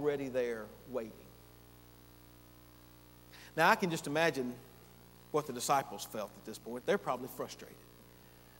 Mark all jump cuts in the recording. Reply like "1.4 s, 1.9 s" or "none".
none

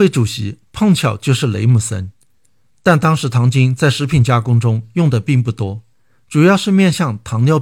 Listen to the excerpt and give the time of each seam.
2.7 s

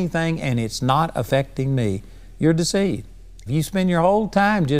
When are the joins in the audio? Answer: 3.5 s

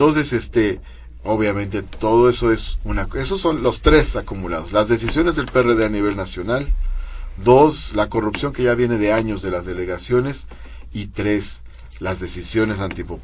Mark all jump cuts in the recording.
none

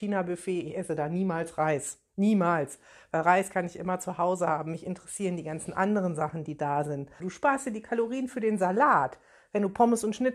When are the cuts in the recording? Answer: 7.2 s

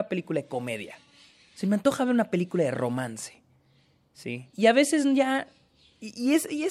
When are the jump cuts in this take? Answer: 4.5 s

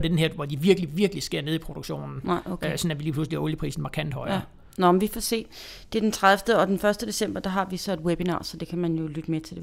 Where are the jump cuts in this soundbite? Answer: none

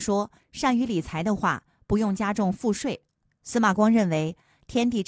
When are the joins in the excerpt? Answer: 3.3 s

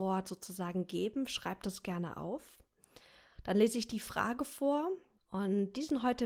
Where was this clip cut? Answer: 5.2 s

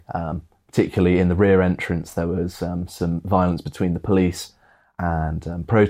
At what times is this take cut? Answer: none

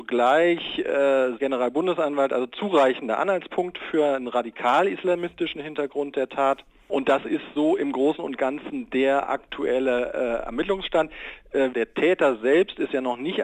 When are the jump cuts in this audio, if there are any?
1.4 s, 11.7 s

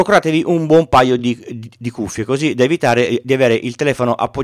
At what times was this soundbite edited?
none

